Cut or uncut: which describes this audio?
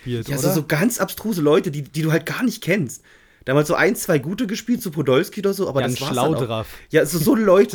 uncut